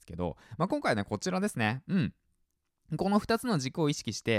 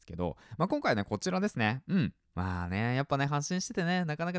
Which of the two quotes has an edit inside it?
second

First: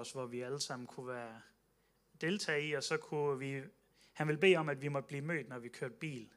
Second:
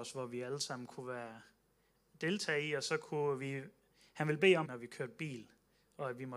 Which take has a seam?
second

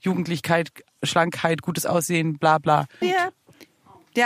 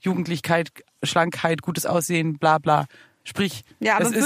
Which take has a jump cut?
first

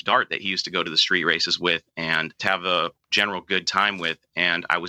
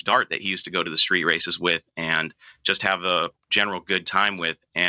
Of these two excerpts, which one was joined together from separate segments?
first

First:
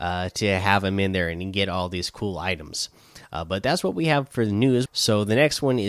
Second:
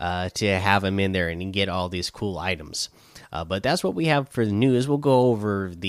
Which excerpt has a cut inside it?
first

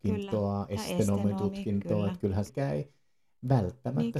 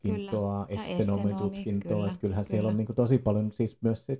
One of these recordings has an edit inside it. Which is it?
first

